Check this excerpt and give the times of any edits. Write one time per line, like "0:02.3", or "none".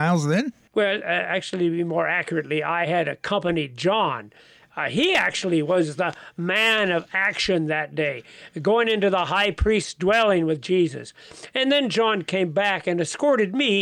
none